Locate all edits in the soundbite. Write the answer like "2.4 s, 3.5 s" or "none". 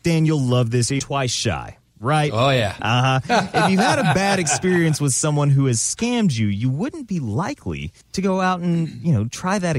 1.0 s, 2.8 s, 8.0 s